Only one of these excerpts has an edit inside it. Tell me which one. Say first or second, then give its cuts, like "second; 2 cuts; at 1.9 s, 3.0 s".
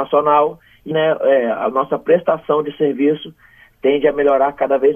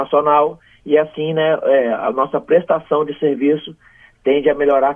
first; 1 cut; at 0.9 s